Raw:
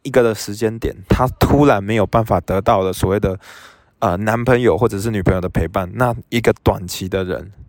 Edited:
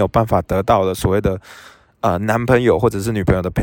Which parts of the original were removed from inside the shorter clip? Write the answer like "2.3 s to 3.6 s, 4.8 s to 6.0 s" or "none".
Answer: none